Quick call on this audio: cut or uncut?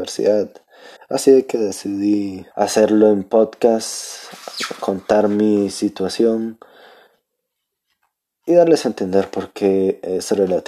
cut